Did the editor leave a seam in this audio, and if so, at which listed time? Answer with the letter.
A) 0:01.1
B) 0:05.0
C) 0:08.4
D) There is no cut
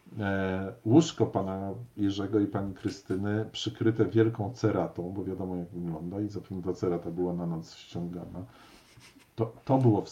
D